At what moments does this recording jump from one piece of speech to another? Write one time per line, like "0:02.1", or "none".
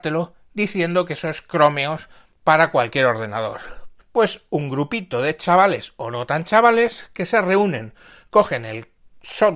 0:04.0